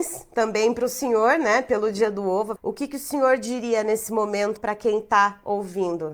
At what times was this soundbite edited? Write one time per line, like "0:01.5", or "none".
0:02.6
0:04.6